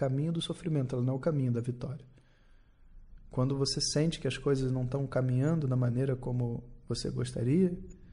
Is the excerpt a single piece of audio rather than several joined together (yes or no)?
yes